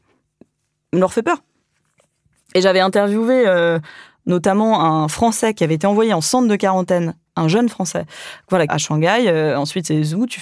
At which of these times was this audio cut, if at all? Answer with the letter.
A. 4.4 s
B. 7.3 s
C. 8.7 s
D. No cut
C